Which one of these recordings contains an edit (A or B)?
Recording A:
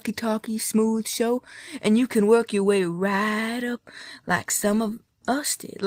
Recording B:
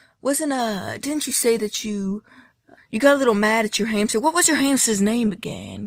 B